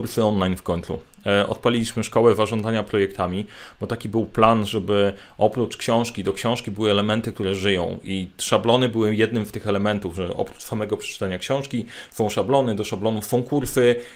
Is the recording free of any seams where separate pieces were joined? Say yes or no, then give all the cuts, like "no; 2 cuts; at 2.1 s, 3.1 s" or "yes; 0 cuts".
yes; 0 cuts